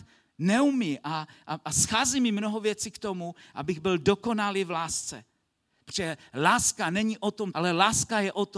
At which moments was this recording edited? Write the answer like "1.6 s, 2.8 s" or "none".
5.8 s, 7.5 s